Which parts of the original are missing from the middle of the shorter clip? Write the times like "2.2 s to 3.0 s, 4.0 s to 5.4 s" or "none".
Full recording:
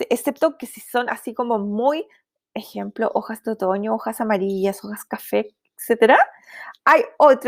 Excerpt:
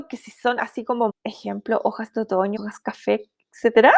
1.6 s to 2.4 s, 3.9 s to 4.8 s